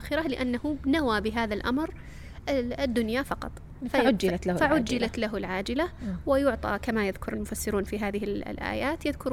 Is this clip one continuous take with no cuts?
yes; 0 cuts

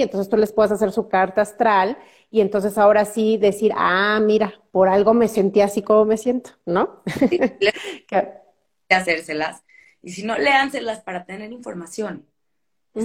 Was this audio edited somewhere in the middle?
no; 0 cuts

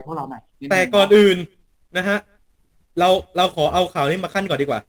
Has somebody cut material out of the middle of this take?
no; 0 cuts

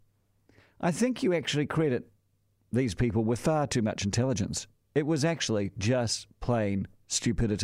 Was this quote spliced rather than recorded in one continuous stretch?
no; 0 cuts

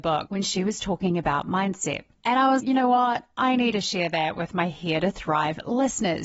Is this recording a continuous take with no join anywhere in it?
no; 1 cut; at 2.6 s

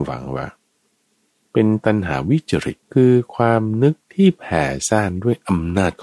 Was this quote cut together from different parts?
yes; 1 cut; at 2.8 s

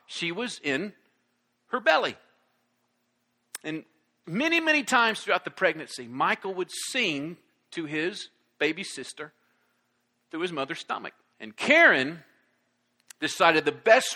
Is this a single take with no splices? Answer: no; 2 cuts; at 4.2 s, 11.3 s

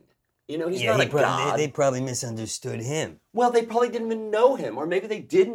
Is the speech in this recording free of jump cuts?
yes; 0 cuts

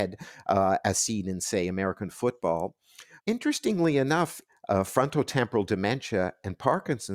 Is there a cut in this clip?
yes; 2 cuts; at 3.2 s, 4.5 s

